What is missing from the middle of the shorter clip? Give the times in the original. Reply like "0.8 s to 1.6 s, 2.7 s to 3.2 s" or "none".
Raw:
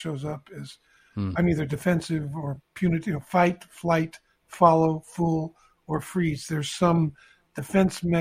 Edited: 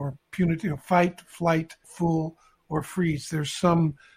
4.3 s to 5.0 s